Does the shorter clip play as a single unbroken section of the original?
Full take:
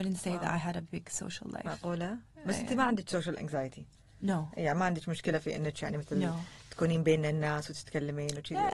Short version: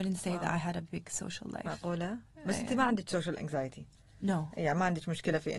yes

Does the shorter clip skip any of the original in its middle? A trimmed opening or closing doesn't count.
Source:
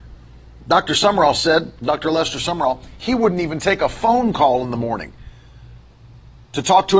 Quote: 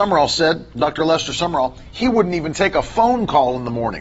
no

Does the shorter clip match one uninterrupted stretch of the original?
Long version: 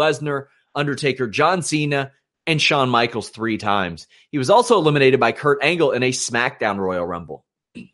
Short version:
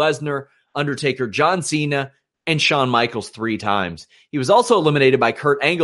yes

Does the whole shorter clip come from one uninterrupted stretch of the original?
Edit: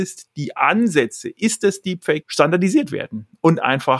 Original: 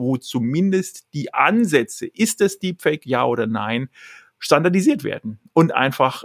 no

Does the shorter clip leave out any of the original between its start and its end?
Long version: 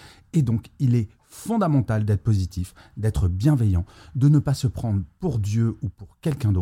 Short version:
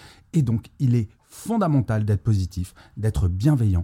no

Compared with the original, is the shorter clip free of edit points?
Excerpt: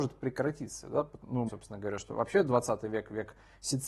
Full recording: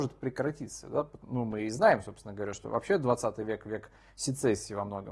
no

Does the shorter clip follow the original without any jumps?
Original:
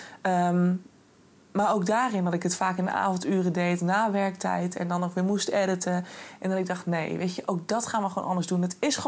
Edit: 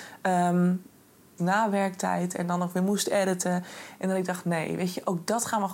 no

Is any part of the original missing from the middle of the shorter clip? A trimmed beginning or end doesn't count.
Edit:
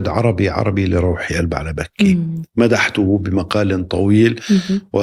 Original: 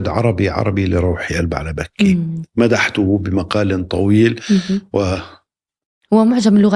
no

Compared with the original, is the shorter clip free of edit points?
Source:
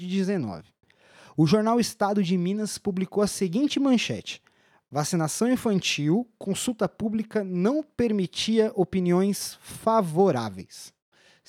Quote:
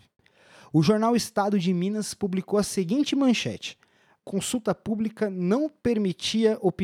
no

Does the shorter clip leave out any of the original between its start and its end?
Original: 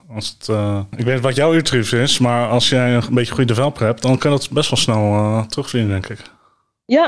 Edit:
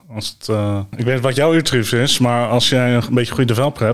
no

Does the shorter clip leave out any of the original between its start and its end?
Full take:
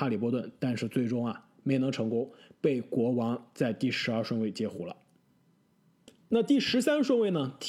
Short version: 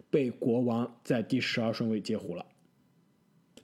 no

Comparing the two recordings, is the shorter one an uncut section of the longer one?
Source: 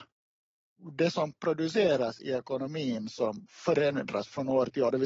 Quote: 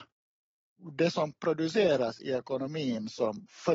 yes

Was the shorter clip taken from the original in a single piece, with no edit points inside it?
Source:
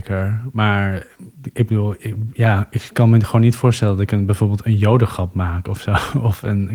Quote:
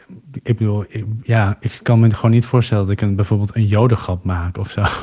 yes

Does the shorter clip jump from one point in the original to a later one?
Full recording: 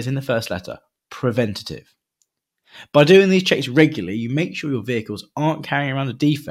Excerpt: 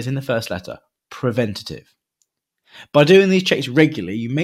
no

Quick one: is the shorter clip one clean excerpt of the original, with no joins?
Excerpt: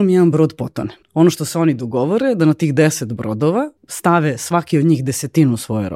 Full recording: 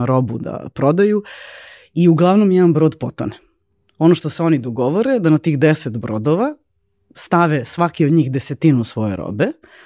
no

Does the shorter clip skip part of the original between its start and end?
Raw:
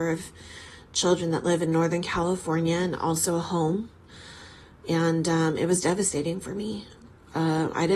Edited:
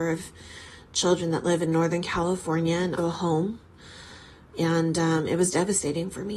yes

